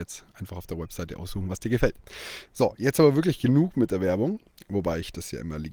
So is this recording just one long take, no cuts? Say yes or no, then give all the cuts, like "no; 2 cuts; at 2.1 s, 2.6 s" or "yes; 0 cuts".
yes; 0 cuts